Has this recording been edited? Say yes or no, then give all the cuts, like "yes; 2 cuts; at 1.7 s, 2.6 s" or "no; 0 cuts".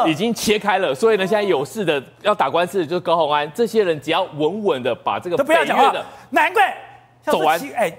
no; 0 cuts